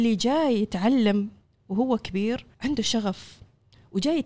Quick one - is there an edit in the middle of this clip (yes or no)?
yes